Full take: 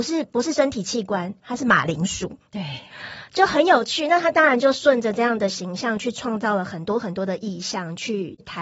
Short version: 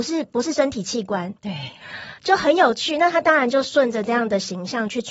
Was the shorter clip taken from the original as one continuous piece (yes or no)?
no